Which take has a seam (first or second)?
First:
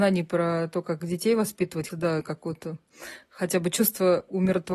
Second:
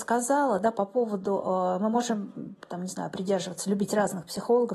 first